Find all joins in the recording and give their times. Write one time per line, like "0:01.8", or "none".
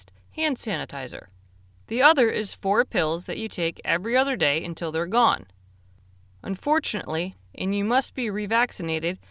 0:01.9
0:07.4